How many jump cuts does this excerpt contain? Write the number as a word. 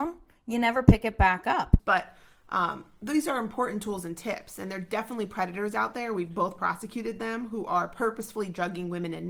one